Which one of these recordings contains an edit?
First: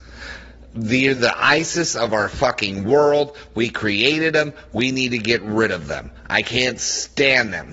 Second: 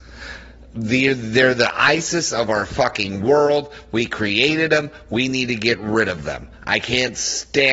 first; 1 cut; at 1.2 s

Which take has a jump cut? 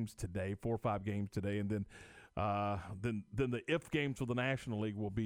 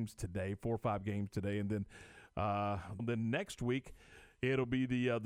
second; 1 cut; at 3.0 s

